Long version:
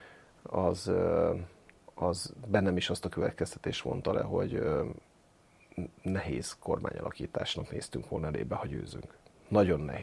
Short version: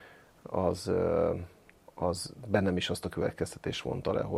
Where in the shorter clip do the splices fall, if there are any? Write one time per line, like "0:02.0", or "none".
none